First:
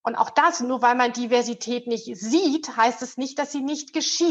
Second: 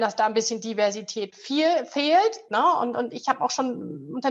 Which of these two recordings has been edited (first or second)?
second